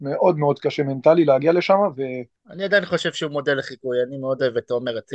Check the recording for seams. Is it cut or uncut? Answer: cut